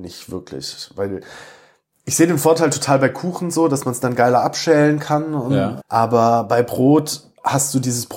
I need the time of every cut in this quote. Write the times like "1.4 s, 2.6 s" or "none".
5.8 s